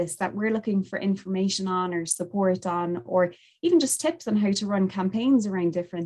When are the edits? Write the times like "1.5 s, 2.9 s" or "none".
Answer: none

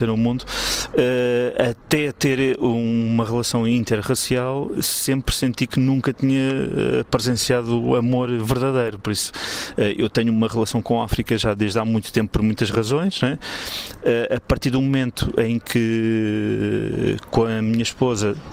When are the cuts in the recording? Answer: 0.9 s, 4.7 s

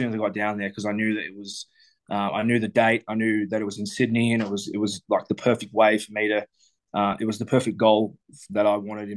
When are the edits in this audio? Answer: none

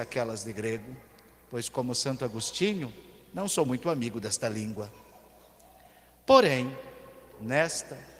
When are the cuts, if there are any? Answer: none

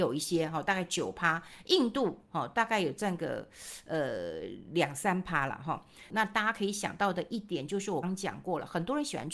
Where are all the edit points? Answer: 6.1 s, 8.0 s

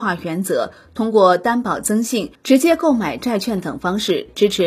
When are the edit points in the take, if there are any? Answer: 2.4 s

